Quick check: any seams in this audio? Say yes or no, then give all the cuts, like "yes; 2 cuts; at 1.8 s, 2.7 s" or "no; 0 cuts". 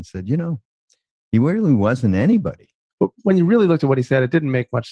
yes; 1 cut; at 2.9 s